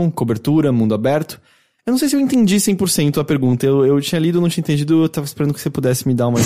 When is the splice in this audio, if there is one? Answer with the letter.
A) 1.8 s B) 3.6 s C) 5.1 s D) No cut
A